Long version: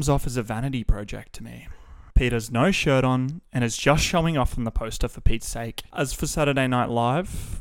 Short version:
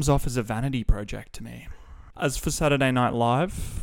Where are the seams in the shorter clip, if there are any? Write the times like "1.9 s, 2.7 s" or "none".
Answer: 2.1 s